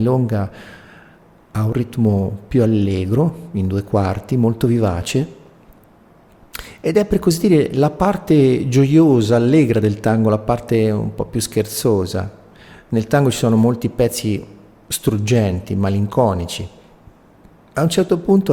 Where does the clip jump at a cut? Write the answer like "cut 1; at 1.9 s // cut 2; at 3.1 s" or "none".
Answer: none